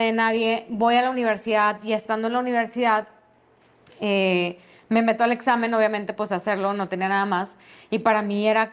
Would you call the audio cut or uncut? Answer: cut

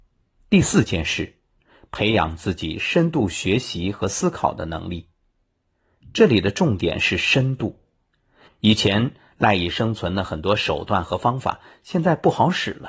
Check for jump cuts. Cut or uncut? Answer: cut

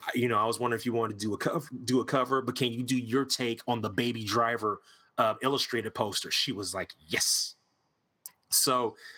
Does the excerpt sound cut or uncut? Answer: uncut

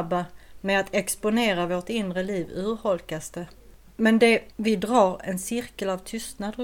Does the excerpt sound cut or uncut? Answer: uncut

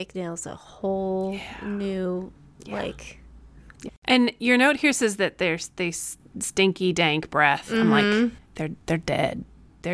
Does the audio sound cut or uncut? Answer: cut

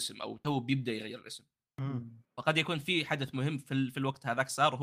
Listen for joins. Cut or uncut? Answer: cut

